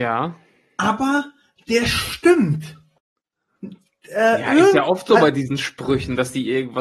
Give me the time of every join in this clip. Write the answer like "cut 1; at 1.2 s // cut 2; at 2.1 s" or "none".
none